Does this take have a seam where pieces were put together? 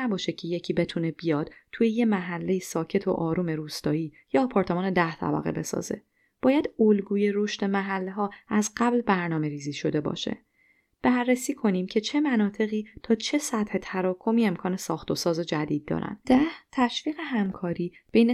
yes; 1 cut; at 16.2 s

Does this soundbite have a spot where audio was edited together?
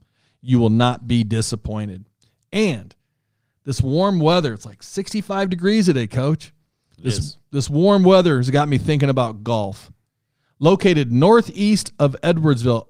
no; 0 cuts

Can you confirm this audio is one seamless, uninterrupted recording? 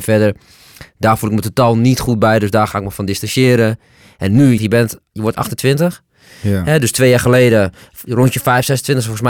no; 1 cut; at 4.6 s

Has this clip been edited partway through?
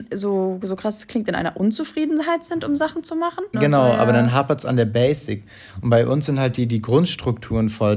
yes; 1 cut; at 3.5 s

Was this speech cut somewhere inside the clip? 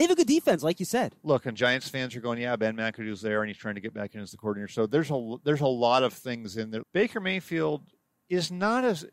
yes; 1 cut; at 6.8 s

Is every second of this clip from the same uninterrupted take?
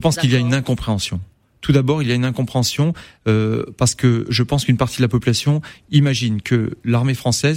yes; 0 cuts

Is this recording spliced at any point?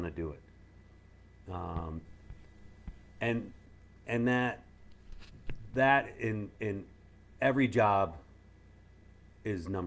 no; 0 cuts

